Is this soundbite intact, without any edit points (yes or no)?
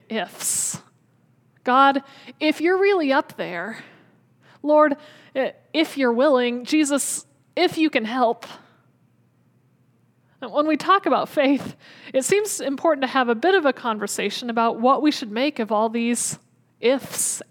yes